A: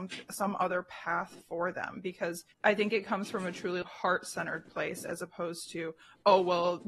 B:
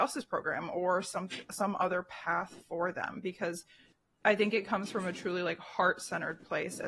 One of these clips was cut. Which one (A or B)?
A